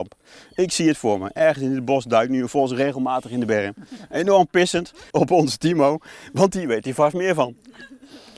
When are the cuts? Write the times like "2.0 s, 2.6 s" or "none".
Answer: 5.1 s